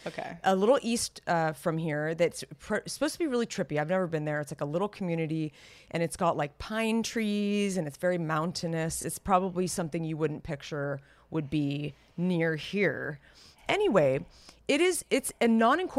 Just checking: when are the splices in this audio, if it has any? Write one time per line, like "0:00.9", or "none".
none